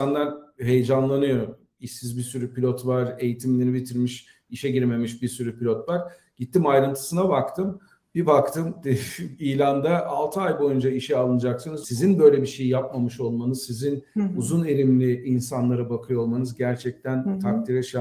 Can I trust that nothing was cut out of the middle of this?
no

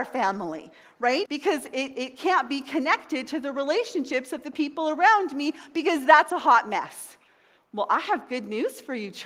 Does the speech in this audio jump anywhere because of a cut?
yes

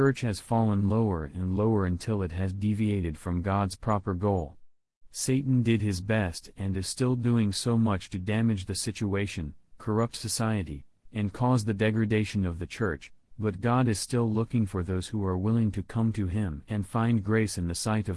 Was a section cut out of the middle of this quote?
no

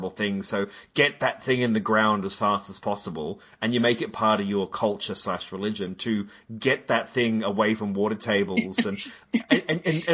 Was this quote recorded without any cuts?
yes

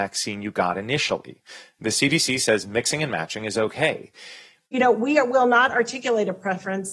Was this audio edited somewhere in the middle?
yes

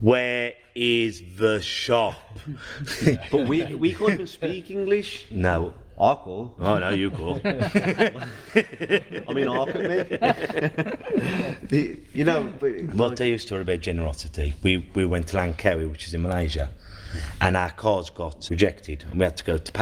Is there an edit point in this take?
yes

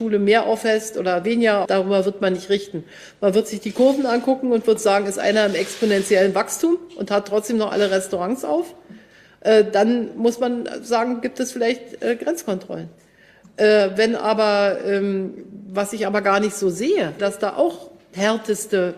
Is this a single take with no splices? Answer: no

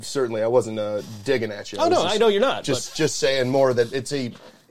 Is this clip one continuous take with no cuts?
yes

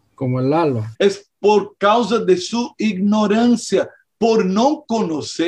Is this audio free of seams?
no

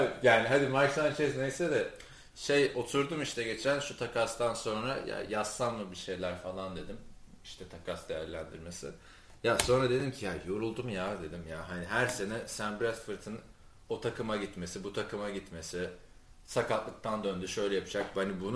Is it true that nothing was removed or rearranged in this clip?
yes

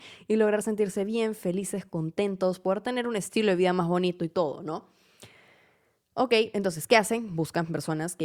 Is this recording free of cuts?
yes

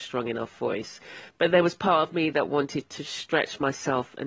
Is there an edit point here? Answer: no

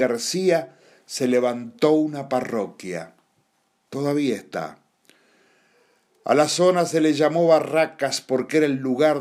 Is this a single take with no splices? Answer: yes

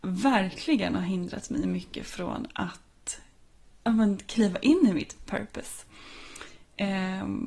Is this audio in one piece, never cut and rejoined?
yes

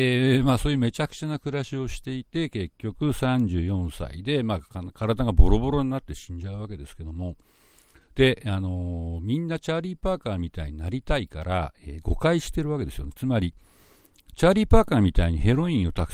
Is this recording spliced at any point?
no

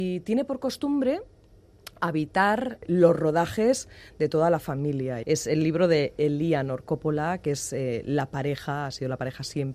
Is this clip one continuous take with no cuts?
no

